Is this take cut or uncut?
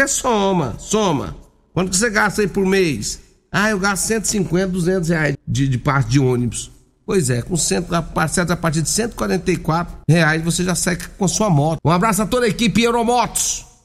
cut